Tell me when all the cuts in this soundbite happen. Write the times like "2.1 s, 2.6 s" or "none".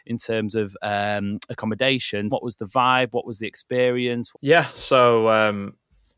2.3 s, 4.3 s